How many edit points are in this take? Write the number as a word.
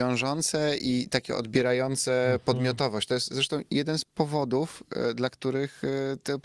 zero